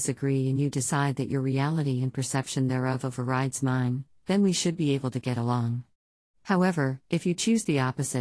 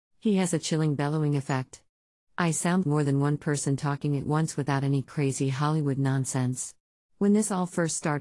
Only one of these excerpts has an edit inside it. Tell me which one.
second; 2 cuts; at 2.8 s, 7.0 s

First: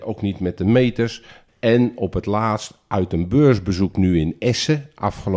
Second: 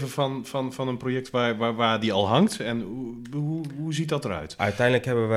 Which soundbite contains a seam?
first; 1 cut; at 1.5 s

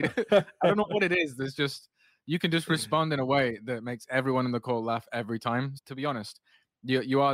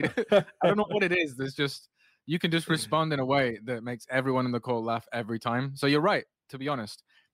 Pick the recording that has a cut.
first; 1 cut; at 5.8 s

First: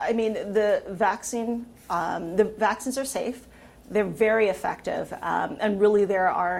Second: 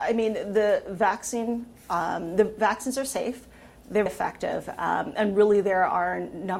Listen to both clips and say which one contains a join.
second; 1 cut; at 4.1 s

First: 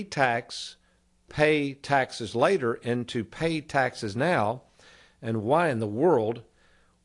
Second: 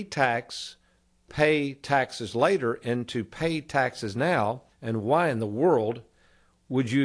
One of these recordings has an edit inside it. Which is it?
second; 1 cut; at 4.7 s

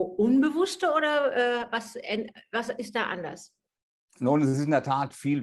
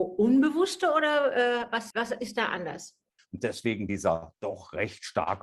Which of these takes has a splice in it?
second; 2 cuts; at 1.9 s, 3.2 s

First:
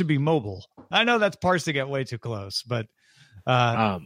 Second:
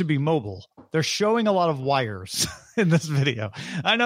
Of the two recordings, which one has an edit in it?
first; 1 cut; at 0.9 s

